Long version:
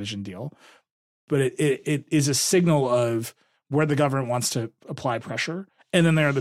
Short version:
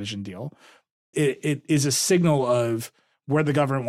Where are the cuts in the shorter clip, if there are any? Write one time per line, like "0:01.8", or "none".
0:01.1